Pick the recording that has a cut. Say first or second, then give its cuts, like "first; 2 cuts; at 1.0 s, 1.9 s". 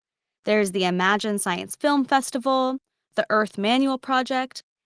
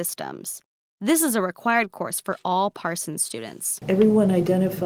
second; 1 cut; at 3.8 s